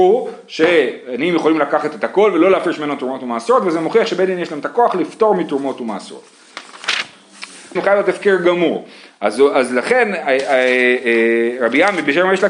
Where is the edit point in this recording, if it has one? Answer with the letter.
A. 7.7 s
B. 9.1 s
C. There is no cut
A